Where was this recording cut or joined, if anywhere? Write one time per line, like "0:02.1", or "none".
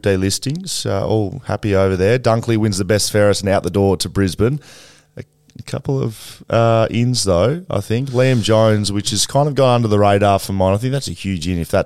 none

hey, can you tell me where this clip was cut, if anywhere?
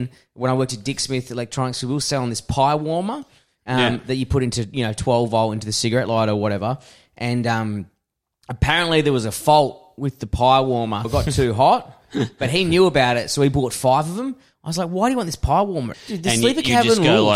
0:11.0
0:15.9

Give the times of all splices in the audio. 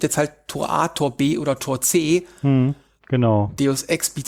0:03.0

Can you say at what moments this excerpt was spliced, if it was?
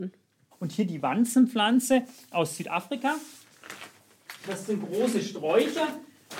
none

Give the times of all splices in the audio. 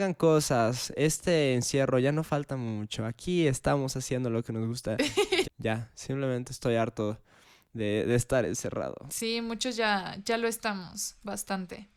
0:05.4

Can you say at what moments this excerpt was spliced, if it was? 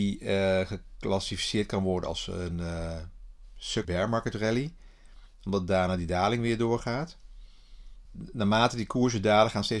0:03.8
0:08.1

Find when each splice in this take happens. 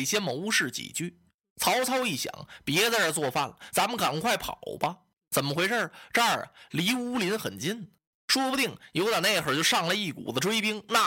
none

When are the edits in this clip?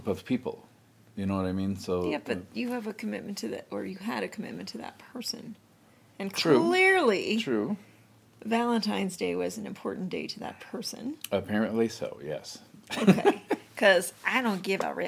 none

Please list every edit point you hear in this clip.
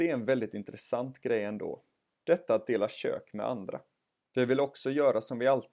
0:04.3

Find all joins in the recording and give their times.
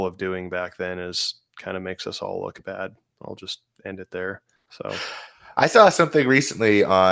none

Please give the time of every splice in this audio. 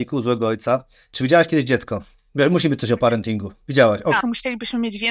0:04.2

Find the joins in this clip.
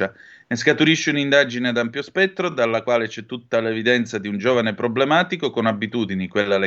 none

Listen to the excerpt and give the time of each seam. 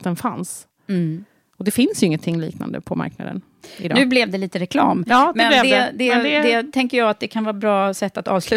none

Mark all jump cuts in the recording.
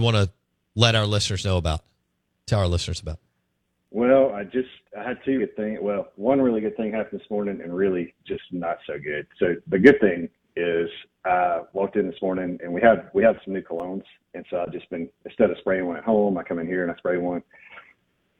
0:05.4

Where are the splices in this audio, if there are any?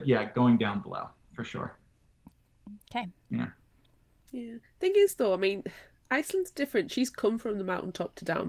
none

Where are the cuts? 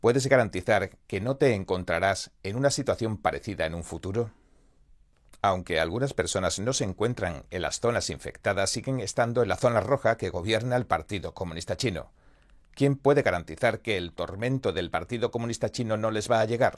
0:05.3

